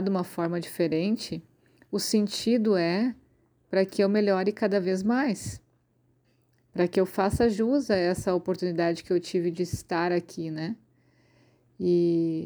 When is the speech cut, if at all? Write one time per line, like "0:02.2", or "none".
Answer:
none